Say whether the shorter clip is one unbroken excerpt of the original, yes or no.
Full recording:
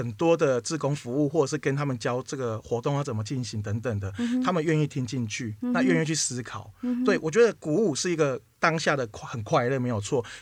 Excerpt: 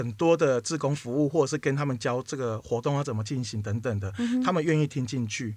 yes